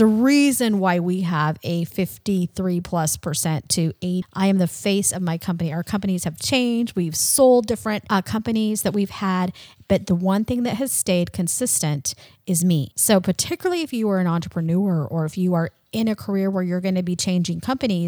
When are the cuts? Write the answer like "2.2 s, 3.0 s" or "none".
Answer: 4.2 s